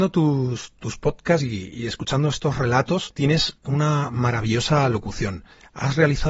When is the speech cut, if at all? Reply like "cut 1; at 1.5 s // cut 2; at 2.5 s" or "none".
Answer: none